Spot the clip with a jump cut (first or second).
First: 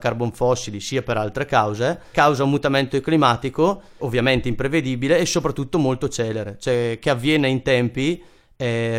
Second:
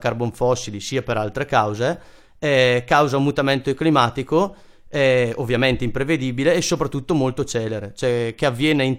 first